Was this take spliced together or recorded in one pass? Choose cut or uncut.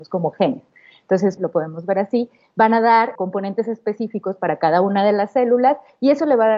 cut